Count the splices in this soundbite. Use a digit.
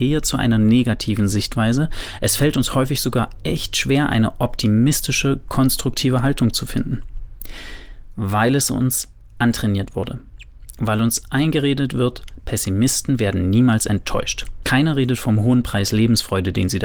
0